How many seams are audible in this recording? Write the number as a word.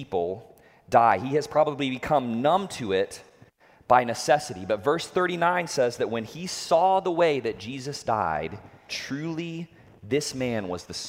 one